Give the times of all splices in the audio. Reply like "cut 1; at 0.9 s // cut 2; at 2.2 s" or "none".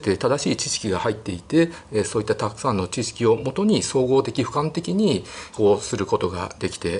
cut 1; at 5.5 s

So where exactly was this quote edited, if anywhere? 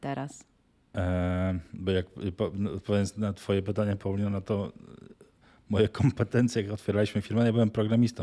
cut 1; at 0.9 s

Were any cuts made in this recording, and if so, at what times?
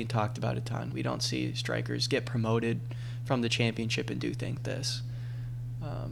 cut 1; at 0.9 s // cut 2; at 4.6 s

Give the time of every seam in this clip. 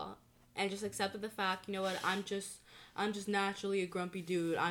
none

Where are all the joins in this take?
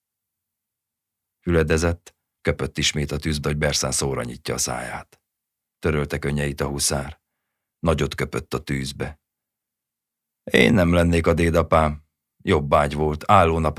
cut 1; at 2.4 s // cut 2; at 3.4 s // cut 3; at 5.7 s

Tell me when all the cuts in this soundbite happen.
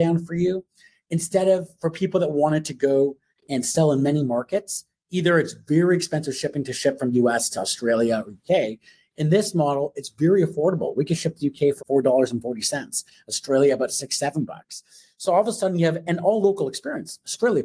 cut 1; at 11.8 s

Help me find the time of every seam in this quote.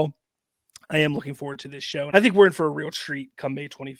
cut 1; at 2.1 s

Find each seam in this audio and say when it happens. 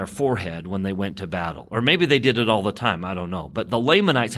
none

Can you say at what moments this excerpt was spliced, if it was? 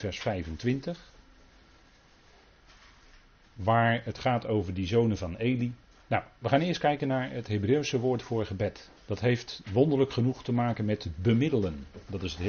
cut 1; at 6.1 s // cut 2; at 9.0 s

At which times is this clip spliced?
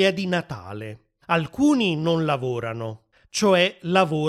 cut 1; at 1.2 s // cut 2; at 3.2 s

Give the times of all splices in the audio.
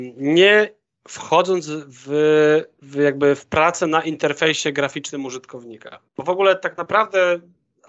none

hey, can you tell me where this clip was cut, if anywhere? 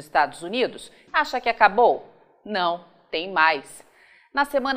cut 1; at 1.1 s

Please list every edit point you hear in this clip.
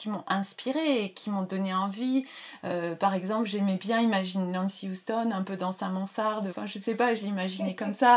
cut 1; at 6.5 s

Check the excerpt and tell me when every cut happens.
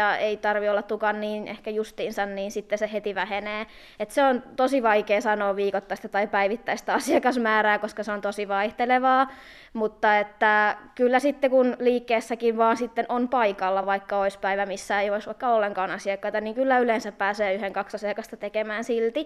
none

